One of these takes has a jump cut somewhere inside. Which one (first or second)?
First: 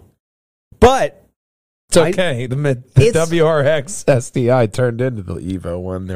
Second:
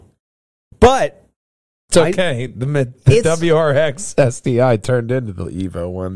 first